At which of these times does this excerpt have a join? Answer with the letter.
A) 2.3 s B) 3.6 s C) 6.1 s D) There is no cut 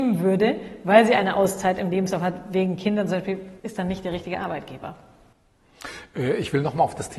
B